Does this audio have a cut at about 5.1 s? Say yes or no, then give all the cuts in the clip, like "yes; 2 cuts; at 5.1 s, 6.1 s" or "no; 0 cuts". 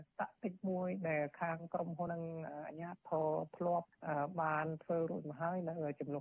no; 1 cut; at 2.1 s